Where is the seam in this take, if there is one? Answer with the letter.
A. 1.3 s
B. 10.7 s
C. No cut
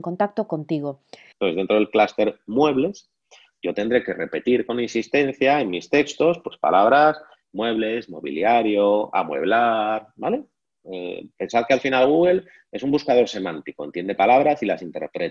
A